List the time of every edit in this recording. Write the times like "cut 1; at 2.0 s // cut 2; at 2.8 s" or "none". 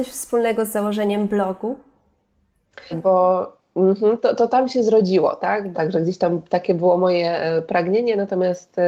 cut 1; at 2.9 s // cut 2; at 5.7 s